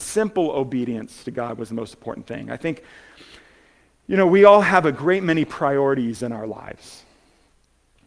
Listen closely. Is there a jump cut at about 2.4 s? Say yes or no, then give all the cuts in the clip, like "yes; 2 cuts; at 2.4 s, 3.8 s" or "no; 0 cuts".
no; 0 cuts